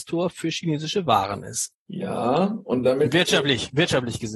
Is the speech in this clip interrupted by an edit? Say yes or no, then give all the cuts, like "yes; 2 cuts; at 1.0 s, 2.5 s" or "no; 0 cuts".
yes; 1 cut; at 1.7 s